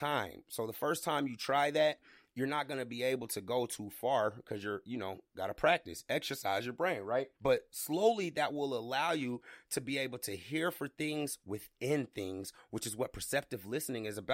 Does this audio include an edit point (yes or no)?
yes